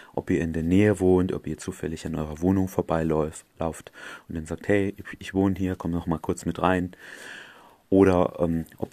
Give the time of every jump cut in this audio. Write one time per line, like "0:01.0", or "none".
none